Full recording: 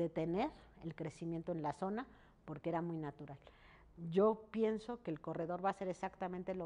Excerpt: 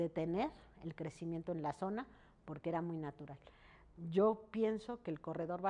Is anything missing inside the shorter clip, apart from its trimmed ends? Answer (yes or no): no